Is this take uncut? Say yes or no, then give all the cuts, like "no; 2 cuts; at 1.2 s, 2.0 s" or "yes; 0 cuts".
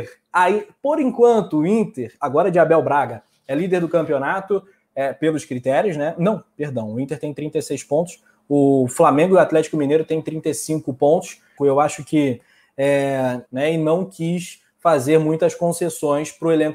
no; 2 cuts; at 11.6 s, 13.5 s